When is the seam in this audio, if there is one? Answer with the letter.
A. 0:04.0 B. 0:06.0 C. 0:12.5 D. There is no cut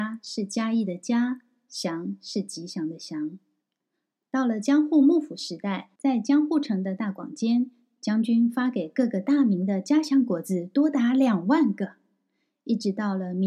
B